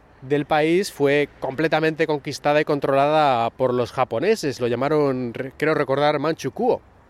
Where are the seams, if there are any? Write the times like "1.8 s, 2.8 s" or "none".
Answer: none